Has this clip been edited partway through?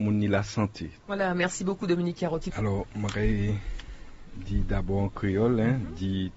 yes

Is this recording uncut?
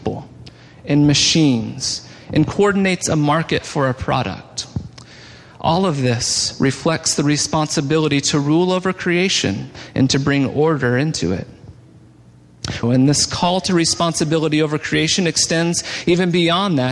no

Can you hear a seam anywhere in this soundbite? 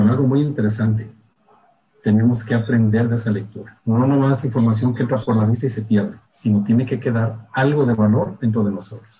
yes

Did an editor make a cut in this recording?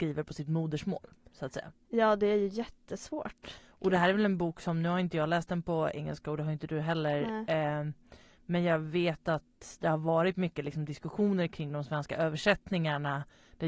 no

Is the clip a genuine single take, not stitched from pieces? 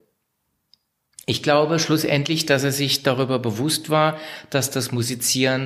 yes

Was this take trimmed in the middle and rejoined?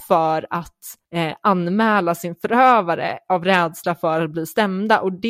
yes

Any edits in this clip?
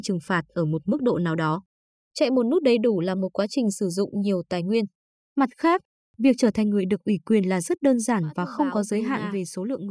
yes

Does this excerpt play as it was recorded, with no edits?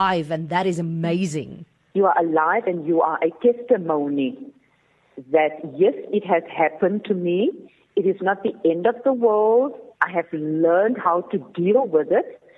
no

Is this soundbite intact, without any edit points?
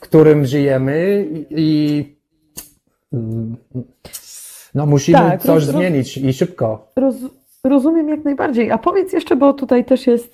yes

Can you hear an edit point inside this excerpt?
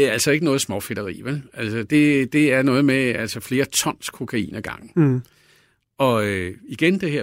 no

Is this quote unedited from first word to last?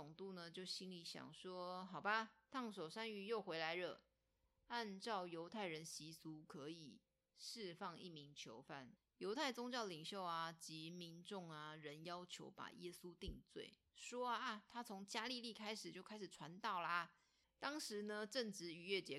no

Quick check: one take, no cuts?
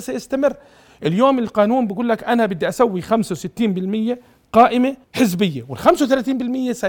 no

